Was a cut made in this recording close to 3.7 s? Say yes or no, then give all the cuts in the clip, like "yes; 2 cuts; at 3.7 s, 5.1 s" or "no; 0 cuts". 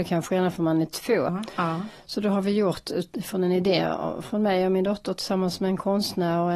no; 1 cut; at 1.3 s